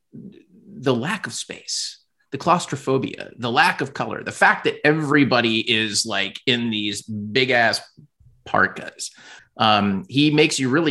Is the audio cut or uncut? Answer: cut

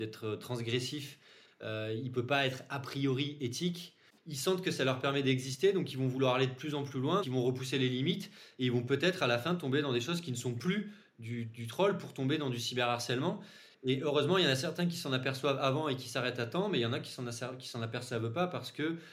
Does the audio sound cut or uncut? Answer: cut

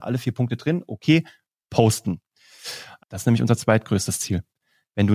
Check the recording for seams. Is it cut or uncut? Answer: cut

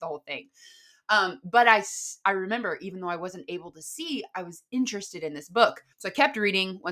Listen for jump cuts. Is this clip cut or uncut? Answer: cut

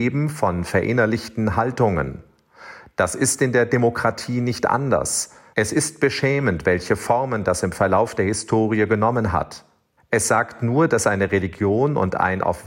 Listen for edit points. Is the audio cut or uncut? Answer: cut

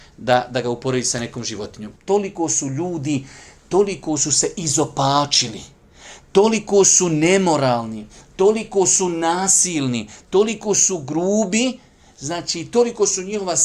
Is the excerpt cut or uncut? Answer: cut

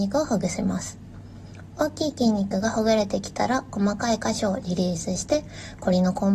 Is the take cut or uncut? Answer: uncut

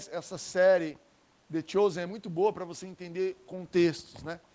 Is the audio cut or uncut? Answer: uncut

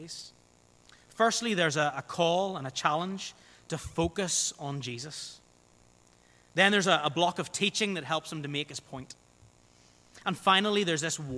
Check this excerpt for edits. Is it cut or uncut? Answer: uncut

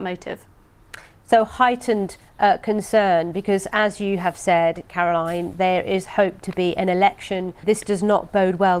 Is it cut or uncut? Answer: cut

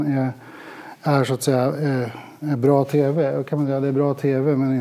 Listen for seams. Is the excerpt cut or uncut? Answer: uncut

